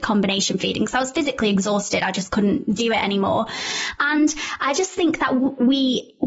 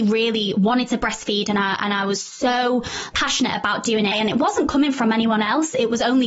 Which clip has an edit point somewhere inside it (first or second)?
second